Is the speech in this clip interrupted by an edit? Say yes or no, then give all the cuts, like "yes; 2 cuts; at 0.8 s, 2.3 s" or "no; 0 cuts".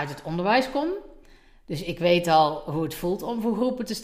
no; 0 cuts